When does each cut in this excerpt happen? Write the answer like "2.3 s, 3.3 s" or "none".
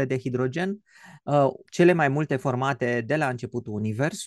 1.7 s